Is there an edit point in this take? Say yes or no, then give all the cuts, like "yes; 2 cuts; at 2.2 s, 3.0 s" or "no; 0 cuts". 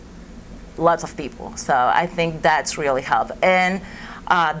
no; 0 cuts